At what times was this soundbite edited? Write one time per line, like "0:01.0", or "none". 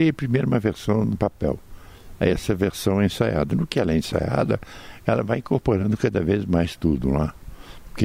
none